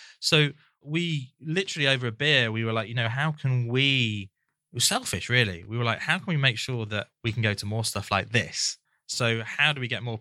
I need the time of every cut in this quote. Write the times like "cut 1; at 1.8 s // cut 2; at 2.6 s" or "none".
none